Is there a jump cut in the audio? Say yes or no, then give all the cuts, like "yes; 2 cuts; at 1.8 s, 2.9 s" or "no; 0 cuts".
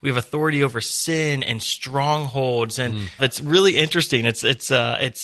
yes; 1 cut; at 3.2 s